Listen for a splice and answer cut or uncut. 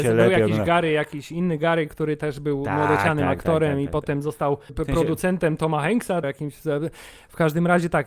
cut